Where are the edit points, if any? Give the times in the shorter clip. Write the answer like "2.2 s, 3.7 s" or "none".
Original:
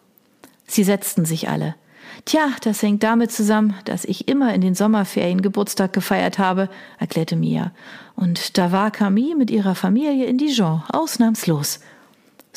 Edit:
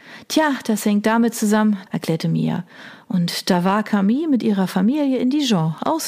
1.9 s

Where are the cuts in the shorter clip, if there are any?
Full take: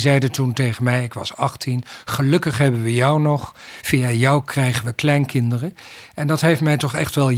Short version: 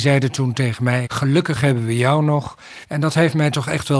1.1 s, 2.8 s

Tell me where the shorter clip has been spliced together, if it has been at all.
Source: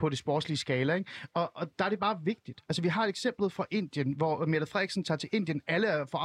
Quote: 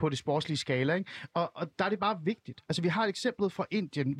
none

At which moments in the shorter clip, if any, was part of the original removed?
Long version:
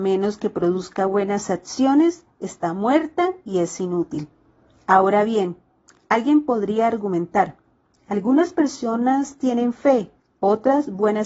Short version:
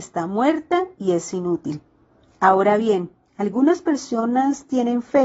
3.2 s

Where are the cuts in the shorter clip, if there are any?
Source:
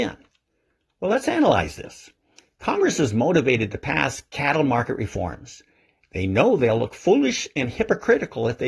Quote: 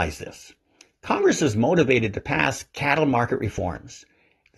none

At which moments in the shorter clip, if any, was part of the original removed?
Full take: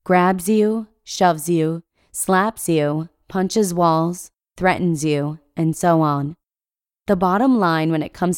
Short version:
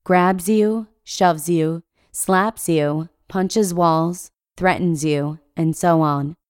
none

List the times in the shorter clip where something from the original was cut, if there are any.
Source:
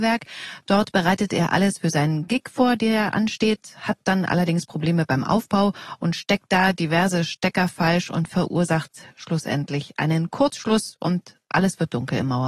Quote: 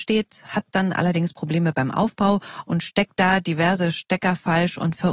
none

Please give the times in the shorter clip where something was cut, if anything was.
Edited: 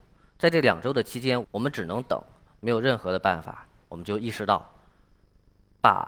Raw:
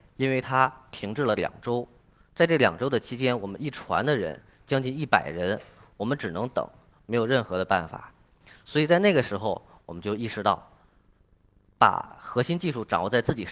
1.4 s, 3.8 s

